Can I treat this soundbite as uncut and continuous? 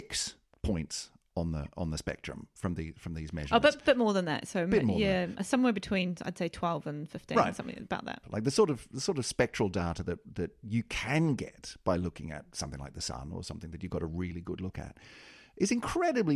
no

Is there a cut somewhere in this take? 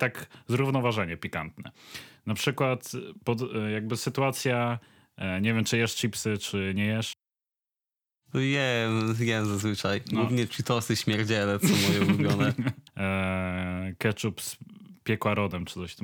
yes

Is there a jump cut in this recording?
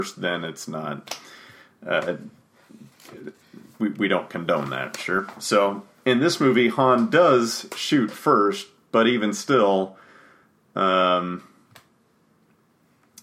no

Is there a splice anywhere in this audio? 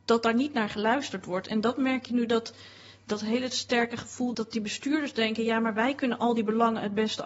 yes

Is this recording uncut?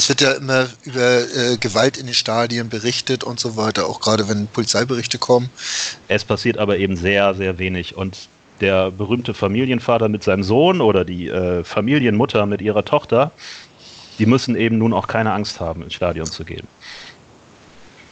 no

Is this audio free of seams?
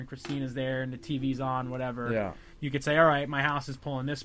yes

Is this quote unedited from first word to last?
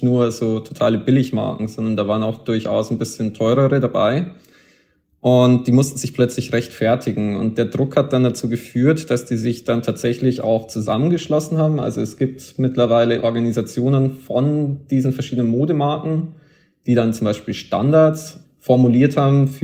yes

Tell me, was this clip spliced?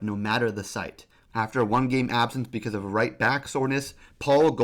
yes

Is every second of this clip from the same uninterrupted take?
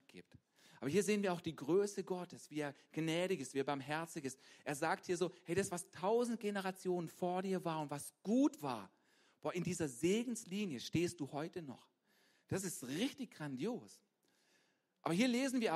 yes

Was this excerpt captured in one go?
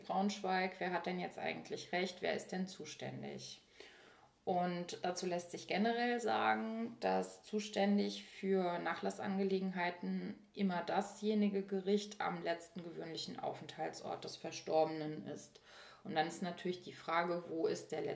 yes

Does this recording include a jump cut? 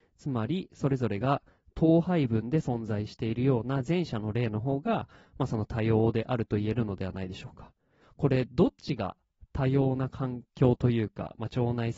yes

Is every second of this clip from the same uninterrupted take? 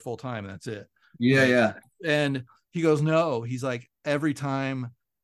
yes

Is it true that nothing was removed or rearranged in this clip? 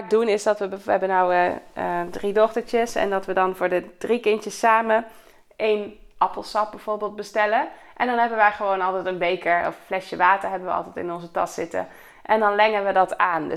yes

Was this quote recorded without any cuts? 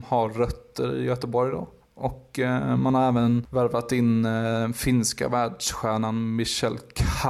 yes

